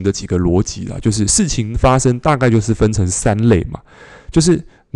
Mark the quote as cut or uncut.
uncut